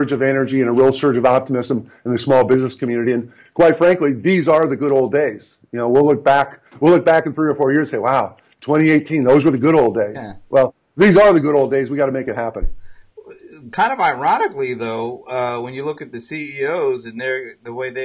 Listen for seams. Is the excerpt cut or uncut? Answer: uncut